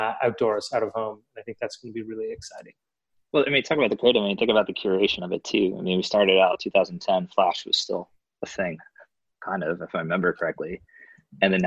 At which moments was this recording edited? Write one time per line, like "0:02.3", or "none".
none